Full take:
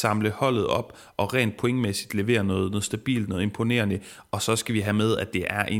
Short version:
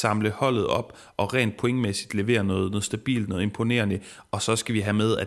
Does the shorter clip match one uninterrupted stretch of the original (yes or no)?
yes